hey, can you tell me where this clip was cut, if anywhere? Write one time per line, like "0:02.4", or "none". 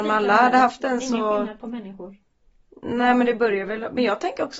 none